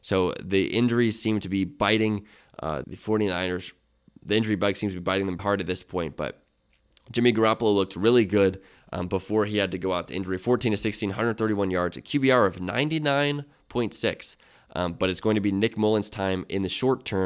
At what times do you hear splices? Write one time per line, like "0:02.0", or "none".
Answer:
0:02.8
0:05.4